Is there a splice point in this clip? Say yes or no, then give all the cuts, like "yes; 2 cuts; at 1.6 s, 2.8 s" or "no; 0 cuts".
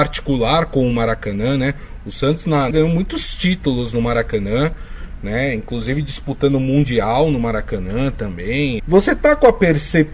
yes; 2 cuts; at 2.7 s, 8.8 s